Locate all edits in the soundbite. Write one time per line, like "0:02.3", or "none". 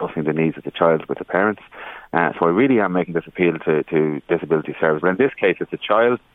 0:03.8
0:05.0

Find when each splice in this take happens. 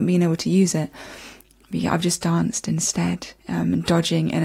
0:03.4

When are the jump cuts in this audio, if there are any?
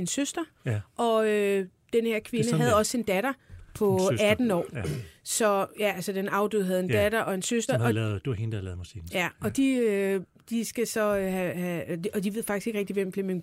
none

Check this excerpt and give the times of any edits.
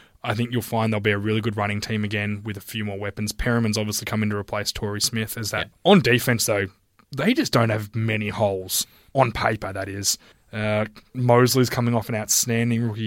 0:05.7
0:10.3

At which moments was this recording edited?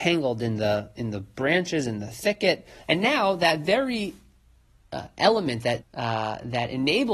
0:02.8
0:05.8

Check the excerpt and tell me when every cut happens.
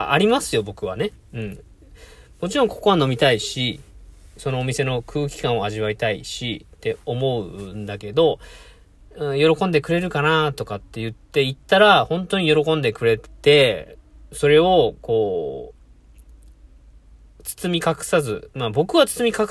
none

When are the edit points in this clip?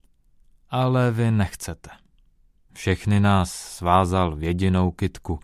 0:02.7

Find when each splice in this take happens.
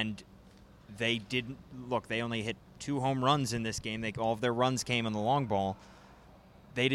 none

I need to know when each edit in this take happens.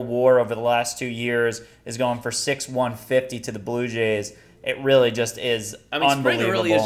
none

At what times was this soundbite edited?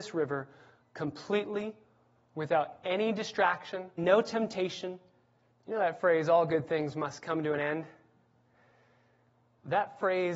0:04.0
0:05.5

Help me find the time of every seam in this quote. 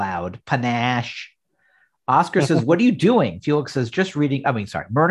none

